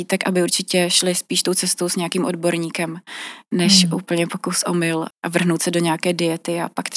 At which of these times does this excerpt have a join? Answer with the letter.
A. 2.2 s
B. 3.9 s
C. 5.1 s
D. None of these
C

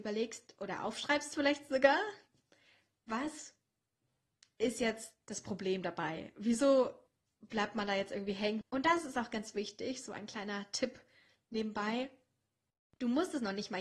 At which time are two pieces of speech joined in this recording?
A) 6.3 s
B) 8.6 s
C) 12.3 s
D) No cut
B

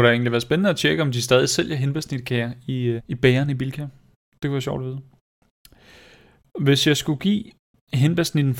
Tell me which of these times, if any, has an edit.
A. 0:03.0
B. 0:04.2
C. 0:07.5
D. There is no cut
A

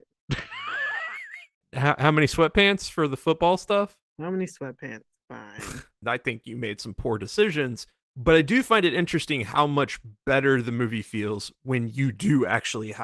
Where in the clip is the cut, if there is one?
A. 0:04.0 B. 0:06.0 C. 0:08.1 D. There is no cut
B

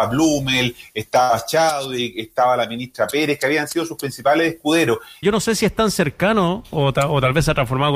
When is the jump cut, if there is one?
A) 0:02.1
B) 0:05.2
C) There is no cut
B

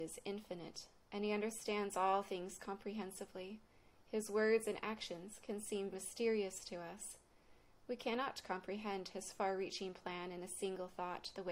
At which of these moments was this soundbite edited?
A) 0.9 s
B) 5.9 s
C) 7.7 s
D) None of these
B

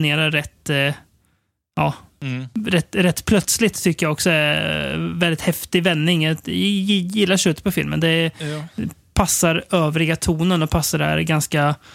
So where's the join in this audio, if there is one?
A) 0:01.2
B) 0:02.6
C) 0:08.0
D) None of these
D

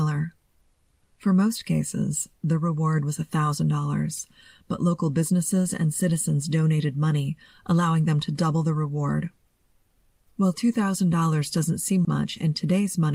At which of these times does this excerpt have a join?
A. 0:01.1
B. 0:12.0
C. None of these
B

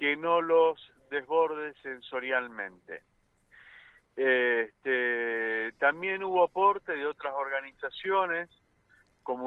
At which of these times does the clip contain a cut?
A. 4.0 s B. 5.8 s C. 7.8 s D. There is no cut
D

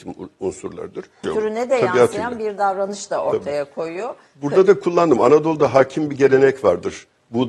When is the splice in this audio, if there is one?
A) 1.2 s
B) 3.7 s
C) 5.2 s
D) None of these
A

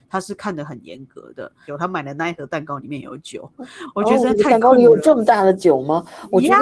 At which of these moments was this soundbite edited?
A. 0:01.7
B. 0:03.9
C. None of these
A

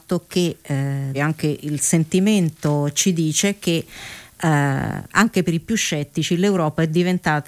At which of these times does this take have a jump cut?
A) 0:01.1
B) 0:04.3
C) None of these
A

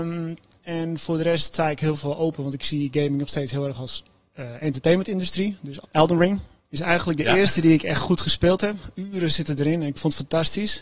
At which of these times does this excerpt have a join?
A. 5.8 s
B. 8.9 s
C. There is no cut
A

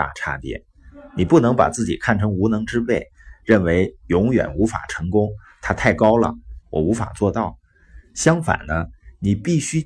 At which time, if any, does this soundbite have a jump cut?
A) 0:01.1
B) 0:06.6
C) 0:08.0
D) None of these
B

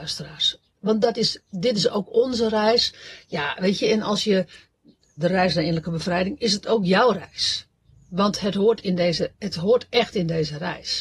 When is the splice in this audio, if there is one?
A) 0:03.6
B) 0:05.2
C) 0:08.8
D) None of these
B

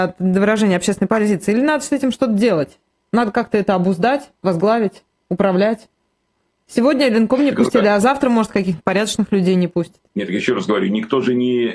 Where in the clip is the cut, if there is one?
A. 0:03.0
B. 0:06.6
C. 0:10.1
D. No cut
C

